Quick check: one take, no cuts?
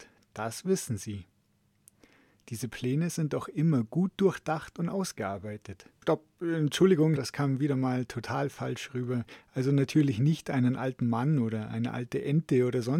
no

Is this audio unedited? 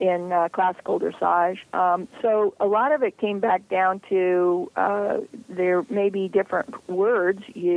no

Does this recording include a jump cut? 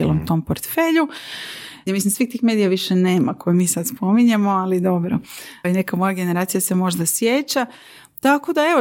yes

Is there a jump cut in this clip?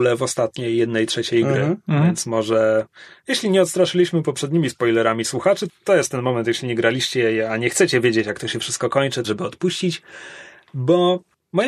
yes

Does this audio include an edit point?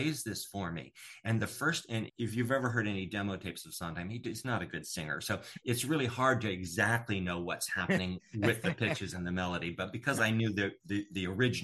yes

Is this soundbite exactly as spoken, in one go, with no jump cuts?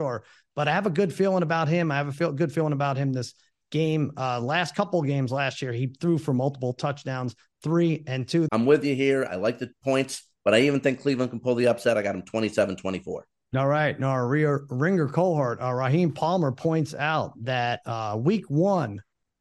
no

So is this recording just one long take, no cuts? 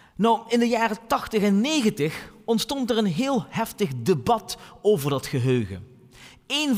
yes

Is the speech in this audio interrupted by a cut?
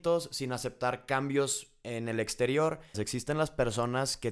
yes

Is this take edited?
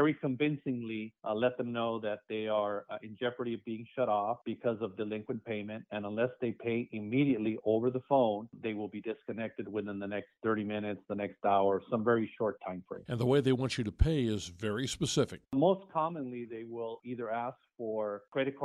no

